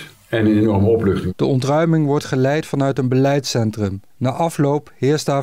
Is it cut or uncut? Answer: cut